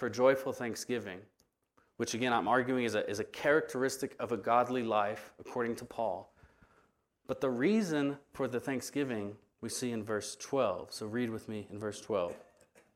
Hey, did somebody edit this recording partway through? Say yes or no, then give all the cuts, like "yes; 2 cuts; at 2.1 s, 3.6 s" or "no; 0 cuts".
no; 0 cuts